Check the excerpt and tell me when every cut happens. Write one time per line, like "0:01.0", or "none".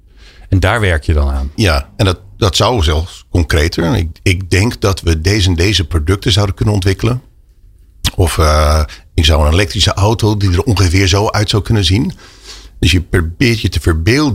0:01.5

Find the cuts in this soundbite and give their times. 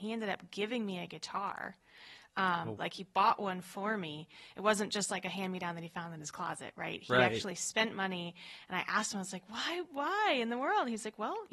0:02.8

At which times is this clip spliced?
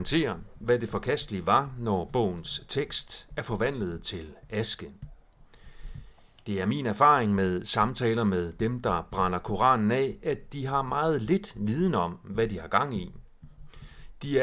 none

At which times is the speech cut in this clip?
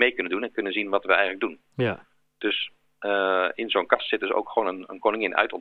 none

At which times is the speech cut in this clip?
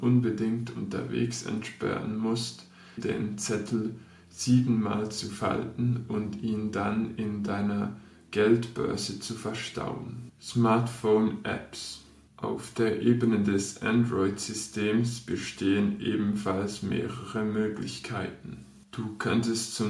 0:03.0

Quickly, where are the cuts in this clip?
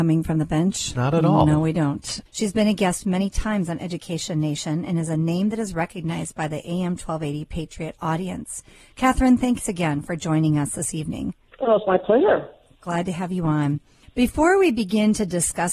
0:02.3

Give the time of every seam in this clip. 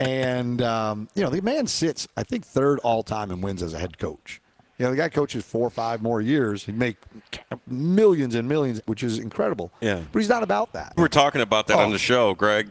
0:08.8
0:11.0

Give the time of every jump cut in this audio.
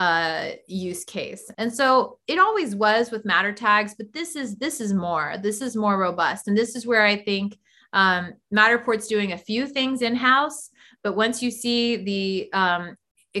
0:01.5

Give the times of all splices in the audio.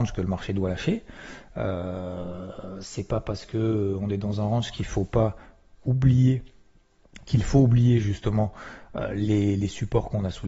none

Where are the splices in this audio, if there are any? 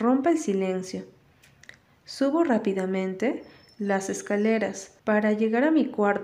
0:05.0

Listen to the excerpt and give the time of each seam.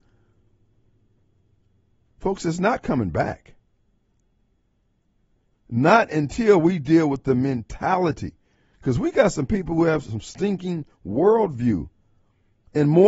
none

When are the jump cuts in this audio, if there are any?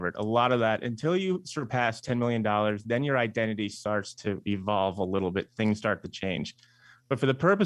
none

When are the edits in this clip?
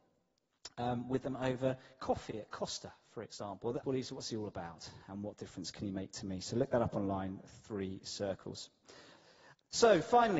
0:03.8

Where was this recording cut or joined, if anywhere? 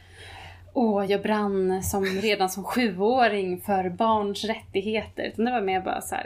none

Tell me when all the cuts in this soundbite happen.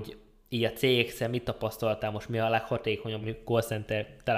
0:03.2

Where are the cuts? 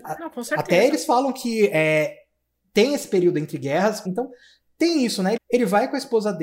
0:04.1
0:05.4

